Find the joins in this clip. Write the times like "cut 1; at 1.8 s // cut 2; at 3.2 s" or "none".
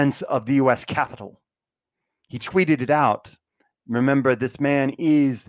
none